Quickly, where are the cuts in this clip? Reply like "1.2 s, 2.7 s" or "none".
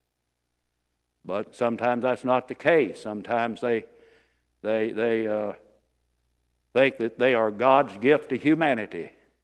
none